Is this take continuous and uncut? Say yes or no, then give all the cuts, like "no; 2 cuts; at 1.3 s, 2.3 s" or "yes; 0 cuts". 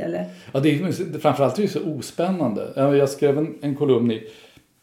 yes; 0 cuts